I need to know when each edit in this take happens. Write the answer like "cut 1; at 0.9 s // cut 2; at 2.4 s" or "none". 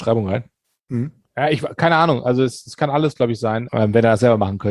cut 1; at 1.2 s // cut 2; at 3.7 s